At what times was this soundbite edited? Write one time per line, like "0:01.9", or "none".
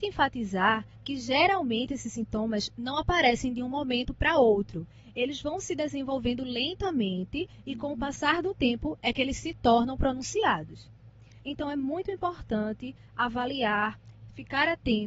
none